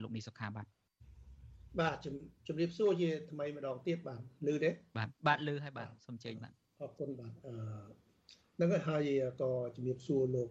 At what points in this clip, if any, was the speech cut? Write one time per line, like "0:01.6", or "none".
0:05.2